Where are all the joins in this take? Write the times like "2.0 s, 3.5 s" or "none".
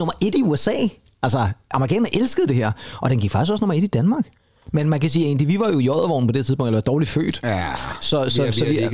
none